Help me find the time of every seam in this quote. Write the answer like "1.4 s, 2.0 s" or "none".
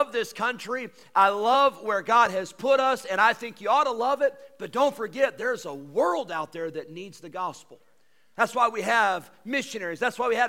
none